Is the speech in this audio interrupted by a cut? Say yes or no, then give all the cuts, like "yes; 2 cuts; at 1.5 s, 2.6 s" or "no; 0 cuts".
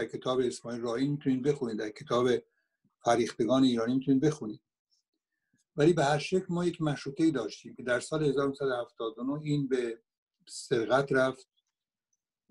no; 0 cuts